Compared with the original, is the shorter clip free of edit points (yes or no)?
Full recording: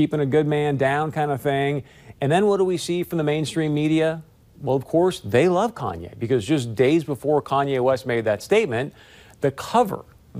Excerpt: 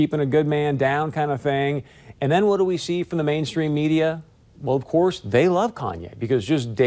yes